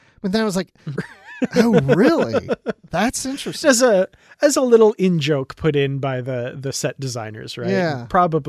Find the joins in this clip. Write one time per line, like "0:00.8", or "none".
0:00.9
0:03.6